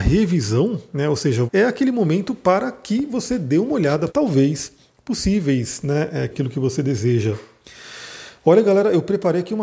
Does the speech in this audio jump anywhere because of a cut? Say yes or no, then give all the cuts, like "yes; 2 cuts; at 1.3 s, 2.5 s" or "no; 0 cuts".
yes; 3 cuts; at 1.5 s, 4.1 s, 6.3 s